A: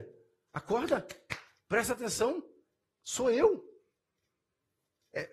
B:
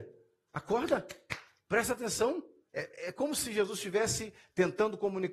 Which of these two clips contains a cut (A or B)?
B